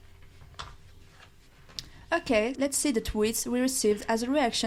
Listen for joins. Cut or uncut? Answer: cut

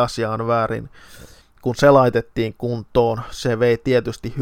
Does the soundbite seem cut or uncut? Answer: cut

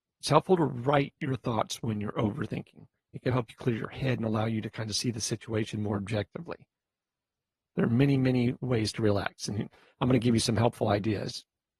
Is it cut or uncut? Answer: cut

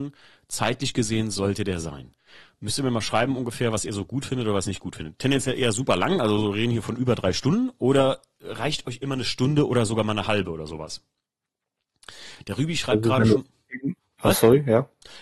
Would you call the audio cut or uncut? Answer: uncut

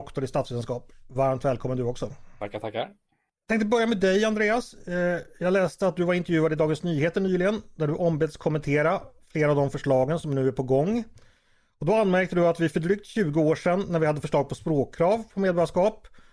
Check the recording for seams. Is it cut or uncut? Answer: uncut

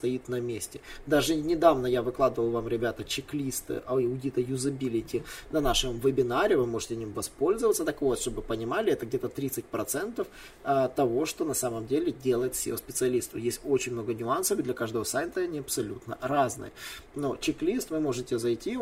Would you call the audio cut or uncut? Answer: uncut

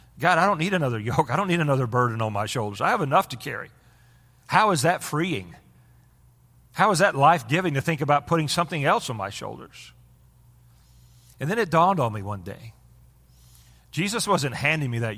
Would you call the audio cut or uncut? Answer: uncut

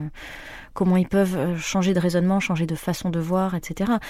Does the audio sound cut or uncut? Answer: uncut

